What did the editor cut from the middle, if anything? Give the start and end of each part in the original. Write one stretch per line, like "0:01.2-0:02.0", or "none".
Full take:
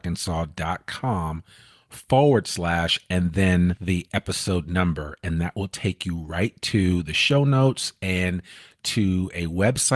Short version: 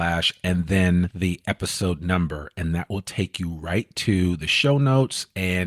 none